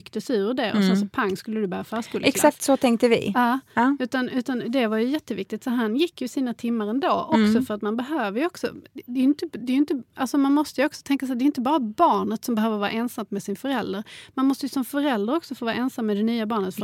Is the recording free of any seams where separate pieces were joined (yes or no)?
yes